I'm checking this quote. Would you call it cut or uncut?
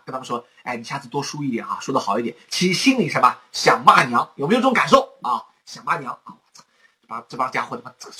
uncut